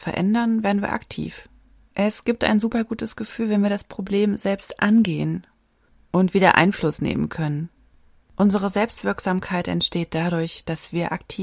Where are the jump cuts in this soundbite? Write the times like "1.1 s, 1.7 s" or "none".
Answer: 1.9 s, 8.2 s